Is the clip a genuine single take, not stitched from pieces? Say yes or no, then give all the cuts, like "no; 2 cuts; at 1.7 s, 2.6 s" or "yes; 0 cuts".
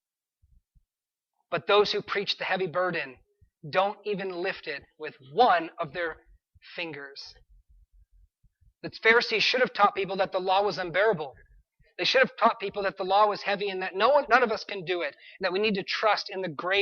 yes; 0 cuts